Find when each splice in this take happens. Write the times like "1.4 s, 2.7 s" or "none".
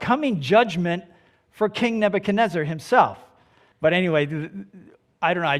3.7 s